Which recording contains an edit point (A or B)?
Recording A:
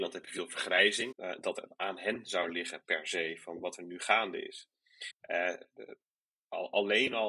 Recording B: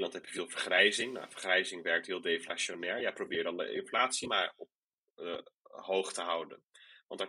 A